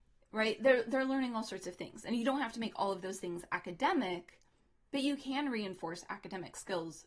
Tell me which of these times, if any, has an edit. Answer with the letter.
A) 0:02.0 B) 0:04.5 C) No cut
C